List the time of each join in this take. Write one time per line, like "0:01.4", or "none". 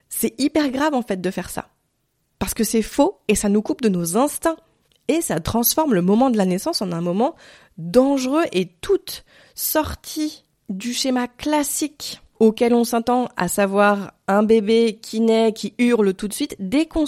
none